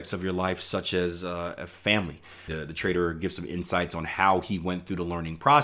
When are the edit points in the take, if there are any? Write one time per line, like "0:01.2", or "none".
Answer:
0:02.5